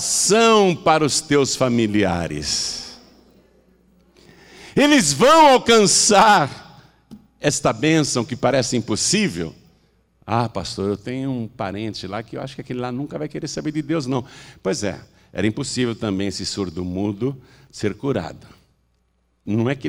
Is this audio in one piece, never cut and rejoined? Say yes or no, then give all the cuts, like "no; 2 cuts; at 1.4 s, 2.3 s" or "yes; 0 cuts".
yes; 0 cuts